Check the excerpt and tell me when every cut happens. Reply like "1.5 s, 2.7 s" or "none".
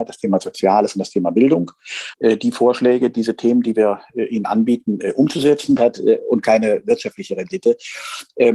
2.1 s, 5.8 s